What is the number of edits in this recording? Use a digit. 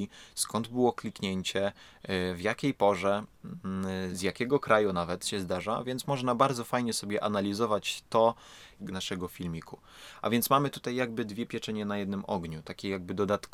2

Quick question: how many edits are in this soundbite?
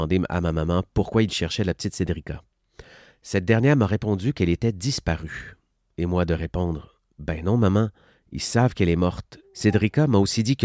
1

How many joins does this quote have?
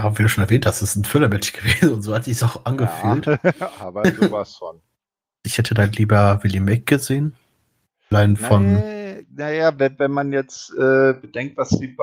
2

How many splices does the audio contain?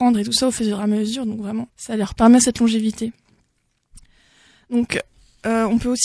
1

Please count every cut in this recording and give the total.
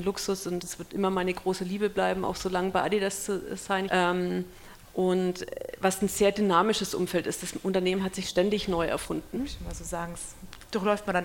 2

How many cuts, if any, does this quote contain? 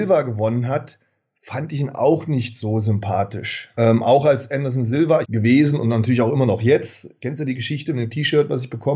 2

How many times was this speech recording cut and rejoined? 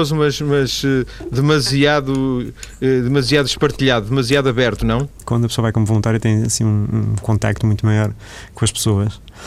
1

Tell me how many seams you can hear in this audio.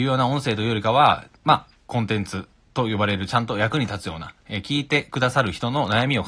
1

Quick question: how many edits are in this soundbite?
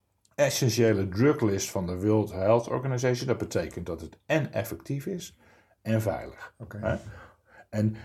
0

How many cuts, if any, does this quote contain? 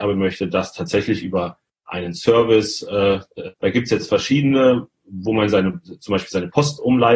1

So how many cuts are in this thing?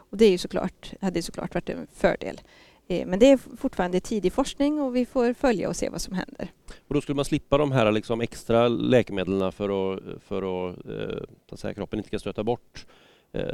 1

